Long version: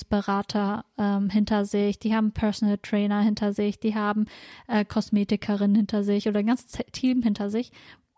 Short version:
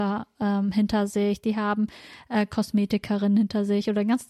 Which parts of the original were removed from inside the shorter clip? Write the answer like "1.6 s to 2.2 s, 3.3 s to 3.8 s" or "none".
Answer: 2.0 s to 3.8 s

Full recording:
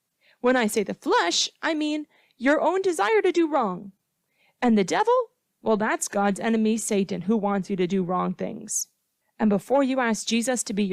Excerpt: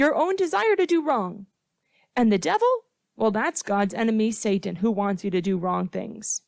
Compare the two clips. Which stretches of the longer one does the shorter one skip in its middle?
none

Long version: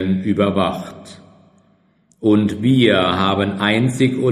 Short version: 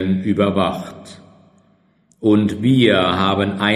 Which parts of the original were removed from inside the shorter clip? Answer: none

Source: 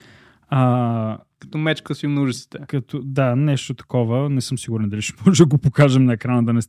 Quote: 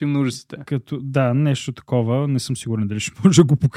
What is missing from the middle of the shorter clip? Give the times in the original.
none

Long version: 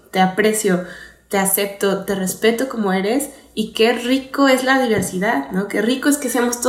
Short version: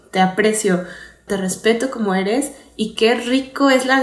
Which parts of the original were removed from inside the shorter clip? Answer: 1.3 s to 2.1 s

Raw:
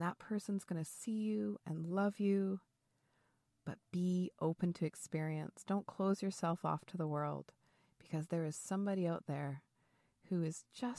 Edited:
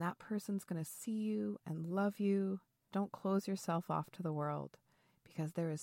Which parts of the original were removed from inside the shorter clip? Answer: 2.9 s to 5.6 s

